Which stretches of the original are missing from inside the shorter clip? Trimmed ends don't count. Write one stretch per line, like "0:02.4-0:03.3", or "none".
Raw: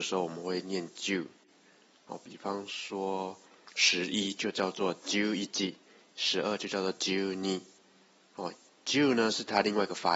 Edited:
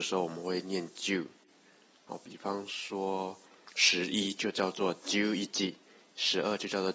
none